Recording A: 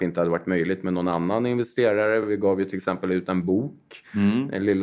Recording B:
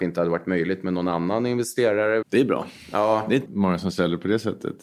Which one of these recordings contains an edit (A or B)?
B